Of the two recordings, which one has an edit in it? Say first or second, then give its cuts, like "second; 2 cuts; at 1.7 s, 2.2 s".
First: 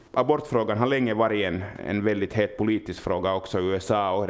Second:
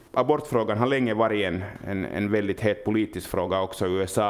first; 1 cut; at 1.8 s